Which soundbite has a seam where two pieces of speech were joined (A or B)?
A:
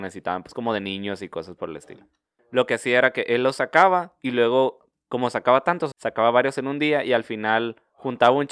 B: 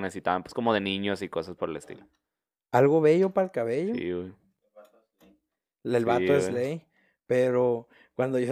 A